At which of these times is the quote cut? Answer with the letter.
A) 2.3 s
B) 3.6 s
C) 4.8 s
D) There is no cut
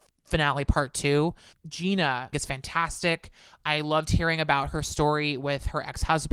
A